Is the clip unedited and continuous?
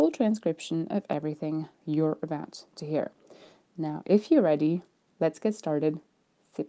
yes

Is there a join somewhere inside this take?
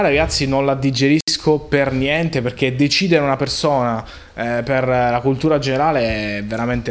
no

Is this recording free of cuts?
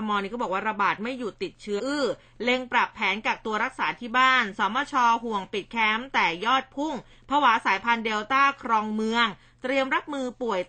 no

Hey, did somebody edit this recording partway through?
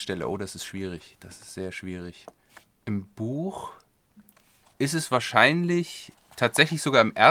no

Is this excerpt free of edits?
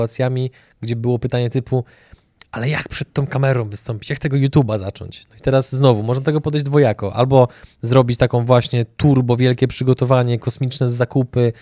yes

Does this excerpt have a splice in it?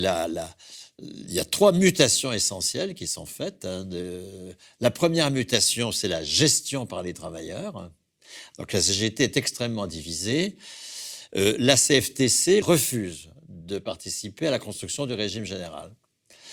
yes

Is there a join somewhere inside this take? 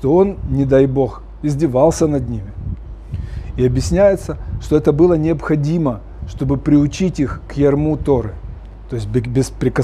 no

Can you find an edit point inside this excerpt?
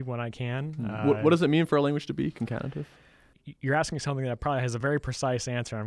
no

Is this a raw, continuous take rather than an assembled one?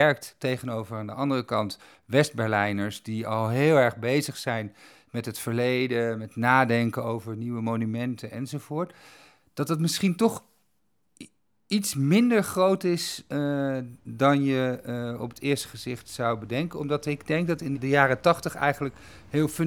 no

